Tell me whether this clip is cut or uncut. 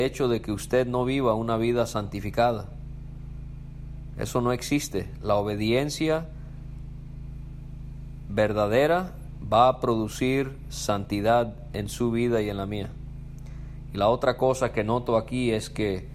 uncut